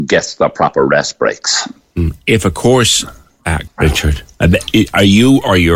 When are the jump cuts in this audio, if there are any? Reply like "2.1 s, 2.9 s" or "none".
3.7 s